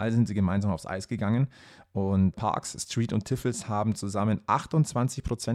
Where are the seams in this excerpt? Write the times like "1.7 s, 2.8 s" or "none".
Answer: 2.3 s